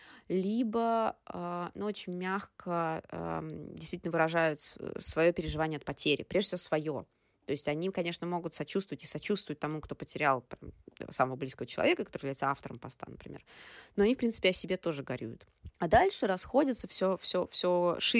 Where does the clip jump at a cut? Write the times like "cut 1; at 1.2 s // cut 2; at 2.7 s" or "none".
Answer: cut 1; at 15.7 s